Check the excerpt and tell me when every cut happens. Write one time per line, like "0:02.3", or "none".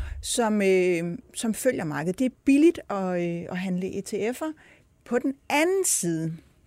0:04.9